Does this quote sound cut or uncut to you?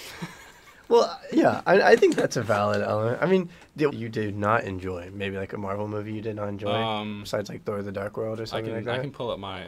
cut